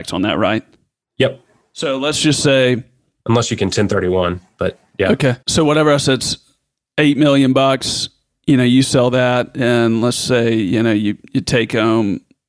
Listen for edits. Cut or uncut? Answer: cut